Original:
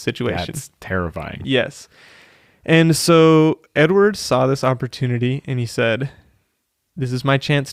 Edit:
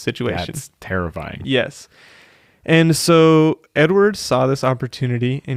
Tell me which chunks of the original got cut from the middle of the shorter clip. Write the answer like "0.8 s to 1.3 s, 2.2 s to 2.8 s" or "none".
none